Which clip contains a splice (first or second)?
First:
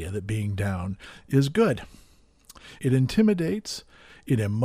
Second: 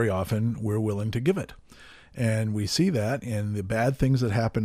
first